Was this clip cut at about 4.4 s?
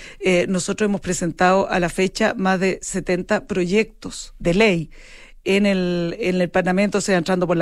yes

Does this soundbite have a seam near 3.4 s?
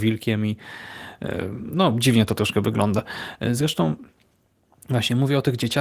no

